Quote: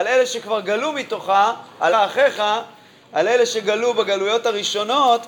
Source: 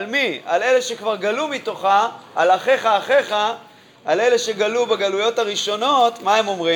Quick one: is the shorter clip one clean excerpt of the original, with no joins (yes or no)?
no